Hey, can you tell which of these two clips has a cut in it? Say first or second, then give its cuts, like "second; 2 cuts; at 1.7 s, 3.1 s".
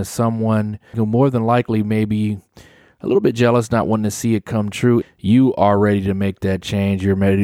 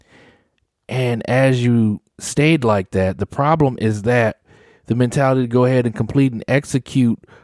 first; 2 cuts; at 0.9 s, 5.0 s